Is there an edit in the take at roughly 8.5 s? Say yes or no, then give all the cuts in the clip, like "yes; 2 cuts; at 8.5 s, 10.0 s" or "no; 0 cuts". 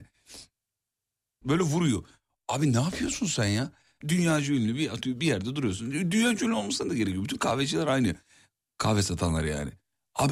no; 2 cuts; at 1.4 s, 4.0 s